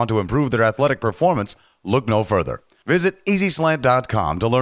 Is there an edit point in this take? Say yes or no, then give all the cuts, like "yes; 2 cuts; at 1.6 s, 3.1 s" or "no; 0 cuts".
no; 0 cuts